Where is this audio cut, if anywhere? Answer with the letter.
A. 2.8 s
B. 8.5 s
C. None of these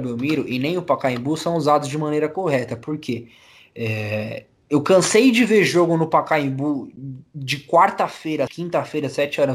B